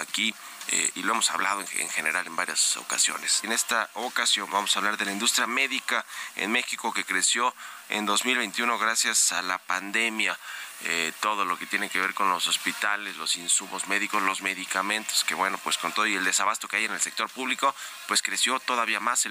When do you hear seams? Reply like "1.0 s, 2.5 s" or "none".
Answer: 3.4 s